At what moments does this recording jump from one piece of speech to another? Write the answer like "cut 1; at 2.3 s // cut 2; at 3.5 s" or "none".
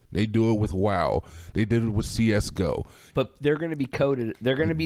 cut 1; at 3.1 s